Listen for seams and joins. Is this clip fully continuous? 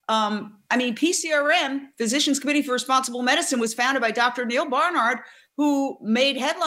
yes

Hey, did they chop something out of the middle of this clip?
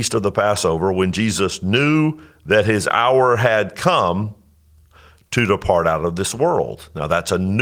no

